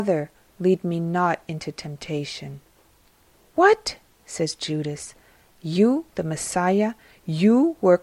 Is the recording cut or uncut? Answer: uncut